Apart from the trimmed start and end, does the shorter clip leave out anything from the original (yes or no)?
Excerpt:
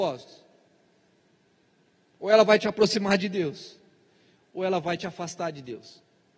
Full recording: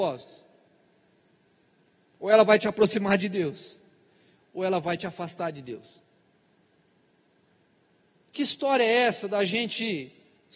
no